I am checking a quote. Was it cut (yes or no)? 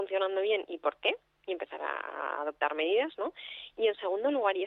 no